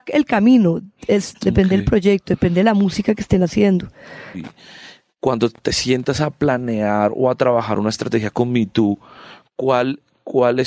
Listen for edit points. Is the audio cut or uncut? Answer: cut